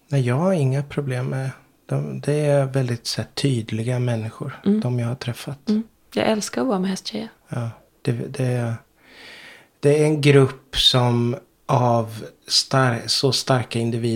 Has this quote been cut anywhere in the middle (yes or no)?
no